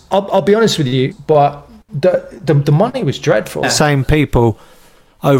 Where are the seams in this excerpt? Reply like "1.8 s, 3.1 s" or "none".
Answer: 1.1 s, 3.6 s